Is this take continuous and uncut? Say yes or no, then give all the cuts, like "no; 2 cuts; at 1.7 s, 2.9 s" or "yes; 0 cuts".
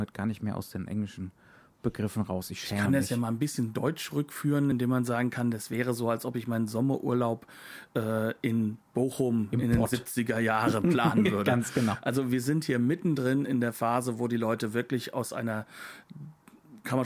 yes; 0 cuts